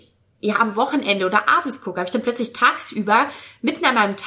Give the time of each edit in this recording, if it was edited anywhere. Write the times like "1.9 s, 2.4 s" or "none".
none

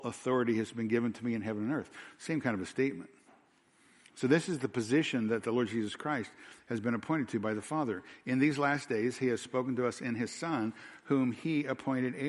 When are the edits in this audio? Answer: none

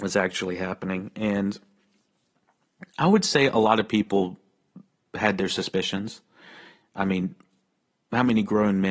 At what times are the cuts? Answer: none

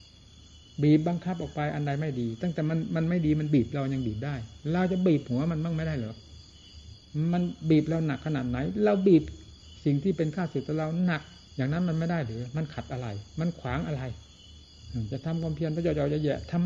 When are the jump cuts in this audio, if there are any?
11.5 s

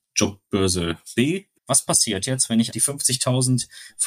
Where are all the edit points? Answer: 1.6 s, 2.7 s

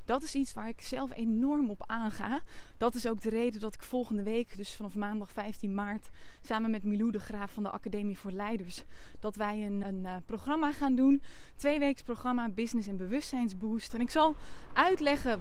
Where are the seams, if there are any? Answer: 9.8 s, 13.9 s

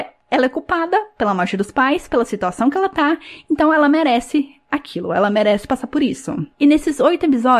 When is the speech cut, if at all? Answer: 6.5 s

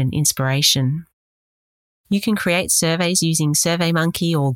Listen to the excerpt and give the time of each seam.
1.9 s

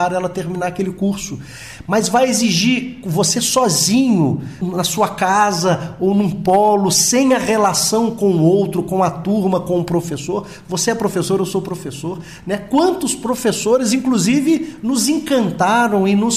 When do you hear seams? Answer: none

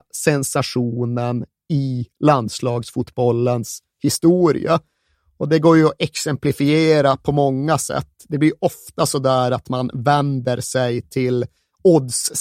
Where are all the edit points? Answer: none

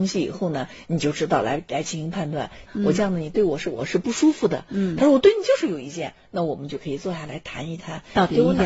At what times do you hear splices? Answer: 2.7 s

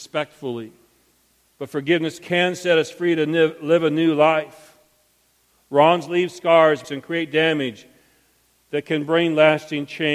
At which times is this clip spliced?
1.5 s, 5.5 s, 6.8 s

